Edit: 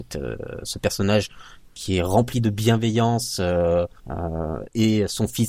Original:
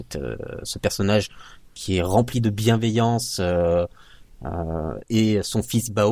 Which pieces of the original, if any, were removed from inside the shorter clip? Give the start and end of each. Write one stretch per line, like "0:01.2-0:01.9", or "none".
0:04.0-0:04.3

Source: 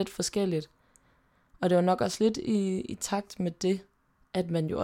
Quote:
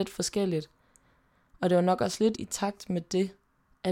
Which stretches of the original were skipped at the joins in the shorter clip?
0:02.3-0:02.8

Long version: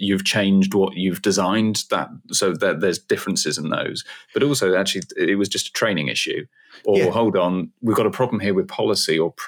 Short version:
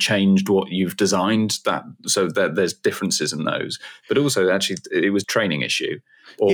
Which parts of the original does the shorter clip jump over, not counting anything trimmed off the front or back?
0:05.5-0:05.7

